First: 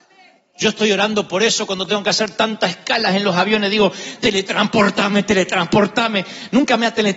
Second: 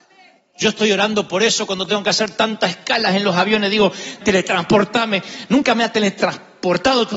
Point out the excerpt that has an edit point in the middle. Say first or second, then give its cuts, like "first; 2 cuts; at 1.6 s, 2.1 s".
second; 1 cut; at 4.2 s